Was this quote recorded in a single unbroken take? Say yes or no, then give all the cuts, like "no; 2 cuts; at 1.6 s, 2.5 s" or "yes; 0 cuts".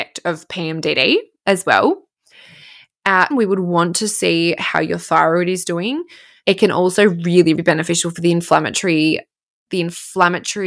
no; 3 cuts; at 3.3 s, 6.4 s, 7.5 s